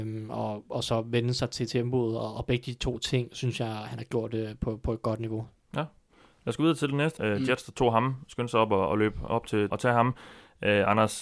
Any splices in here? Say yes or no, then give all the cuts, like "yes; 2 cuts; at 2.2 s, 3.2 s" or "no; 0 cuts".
yes; 2 cuts; at 7.2 s, 9.7 s